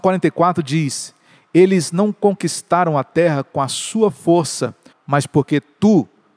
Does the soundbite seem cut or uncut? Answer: cut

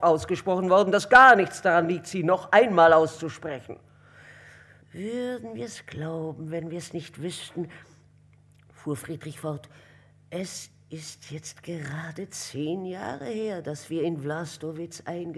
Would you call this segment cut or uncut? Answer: cut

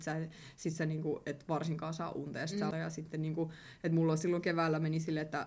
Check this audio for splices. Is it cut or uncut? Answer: cut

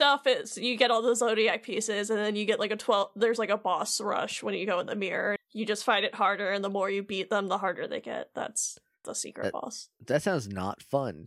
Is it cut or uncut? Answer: cut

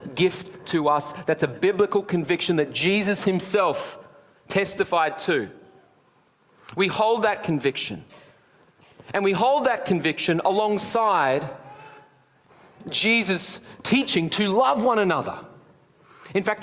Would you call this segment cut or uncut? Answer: uncut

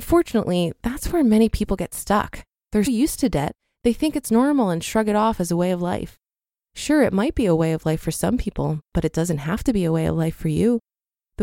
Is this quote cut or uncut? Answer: cut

